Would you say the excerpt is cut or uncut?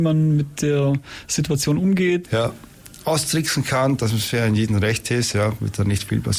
cut